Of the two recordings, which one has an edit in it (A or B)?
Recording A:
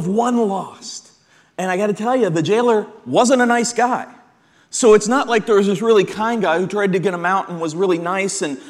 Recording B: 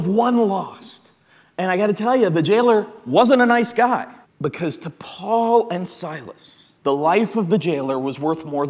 B